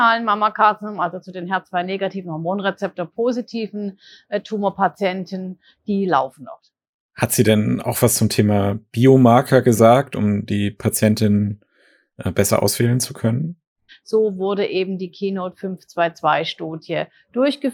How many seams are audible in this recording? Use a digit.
1